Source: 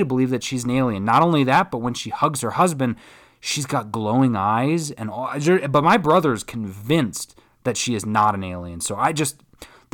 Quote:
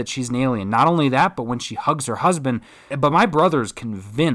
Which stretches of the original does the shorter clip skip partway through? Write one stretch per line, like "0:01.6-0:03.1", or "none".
0:03.3-0:05.6